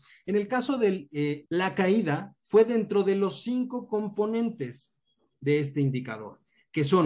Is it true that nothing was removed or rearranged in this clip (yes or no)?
no